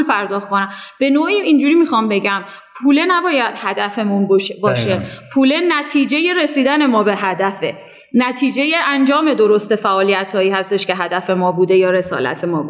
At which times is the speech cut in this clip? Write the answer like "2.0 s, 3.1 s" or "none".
none